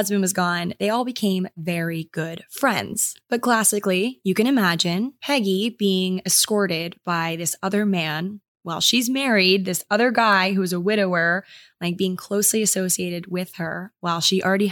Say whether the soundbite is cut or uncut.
uncut